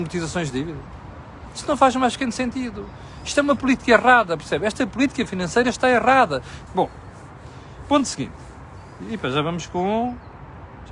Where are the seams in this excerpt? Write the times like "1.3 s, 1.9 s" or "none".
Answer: 6.7 s